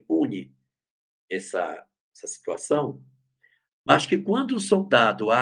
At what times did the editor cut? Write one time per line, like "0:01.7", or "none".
0:03.6